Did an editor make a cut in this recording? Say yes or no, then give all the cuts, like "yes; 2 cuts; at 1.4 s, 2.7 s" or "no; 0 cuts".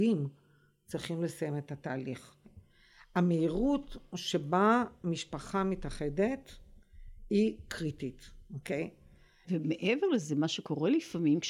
yes; 2 cuts; at 2.4 s, 9.4 s